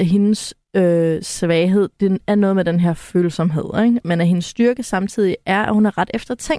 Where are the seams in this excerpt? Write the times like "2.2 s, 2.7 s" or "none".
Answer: none

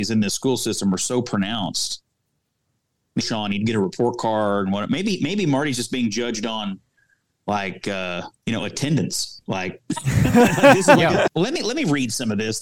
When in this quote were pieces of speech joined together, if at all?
3.2 s, 8.4 s, 11.3 s

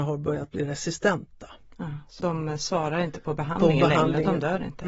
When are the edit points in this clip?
2.2 s

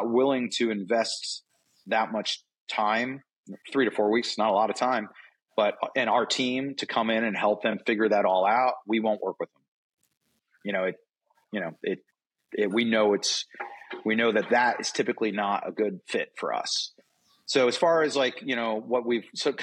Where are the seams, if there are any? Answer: none

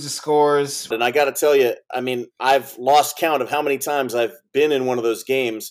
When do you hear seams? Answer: 0.9 s, 2.3 s

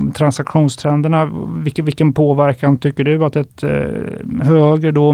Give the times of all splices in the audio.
none

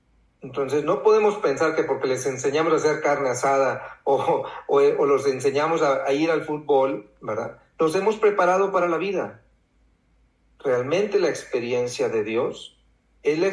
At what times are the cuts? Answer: none

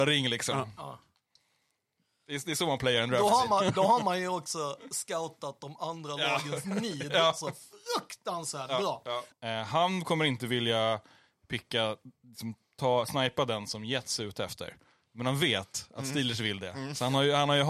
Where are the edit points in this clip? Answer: 9.3 s

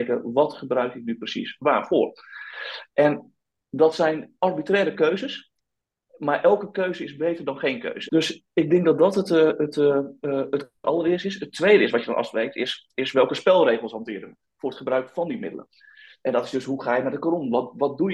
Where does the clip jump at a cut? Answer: 8.1 s

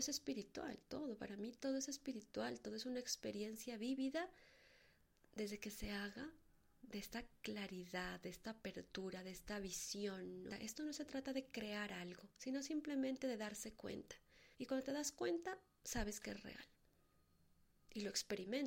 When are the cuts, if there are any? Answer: 10.5 s, 14.5 s

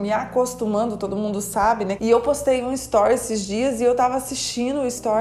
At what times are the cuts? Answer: 2.0 s

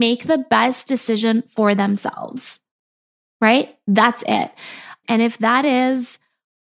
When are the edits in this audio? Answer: 5.0 s

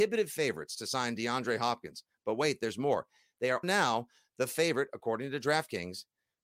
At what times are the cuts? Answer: 3.6 s

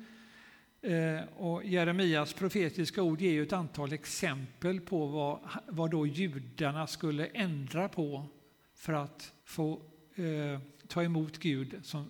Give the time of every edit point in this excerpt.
9.4 s

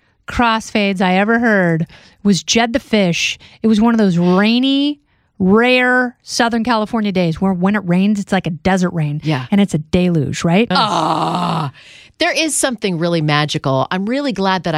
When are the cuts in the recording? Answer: 10.7 s

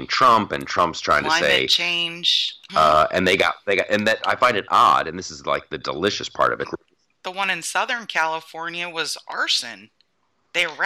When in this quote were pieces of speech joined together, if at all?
2.7 s, 6.6 s

